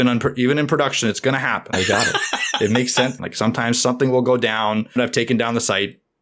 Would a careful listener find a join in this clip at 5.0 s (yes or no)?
yes